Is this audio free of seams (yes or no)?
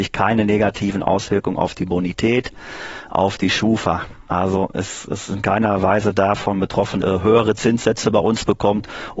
no